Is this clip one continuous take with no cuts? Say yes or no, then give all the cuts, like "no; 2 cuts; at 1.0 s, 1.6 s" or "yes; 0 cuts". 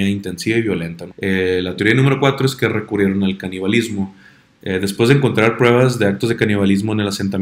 no; 1 cut; at 1.1 s